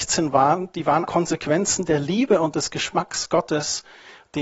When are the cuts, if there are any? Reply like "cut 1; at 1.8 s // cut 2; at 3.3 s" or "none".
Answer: cut 1; at 1.1 s

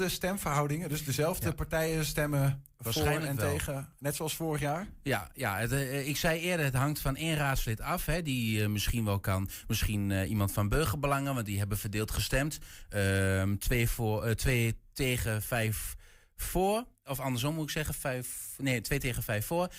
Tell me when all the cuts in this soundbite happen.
none

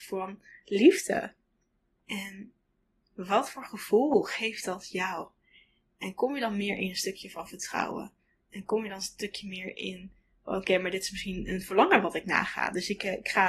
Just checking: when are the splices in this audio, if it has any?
cut 1; at 2.0 s

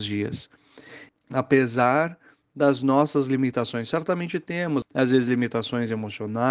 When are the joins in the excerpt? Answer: cut 1; at 1.1 s // cut 2; at 4.8 s

